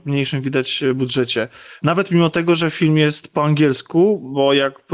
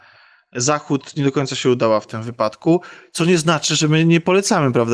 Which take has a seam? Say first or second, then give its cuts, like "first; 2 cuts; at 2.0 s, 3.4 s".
first; 1 cut; at 1.8 s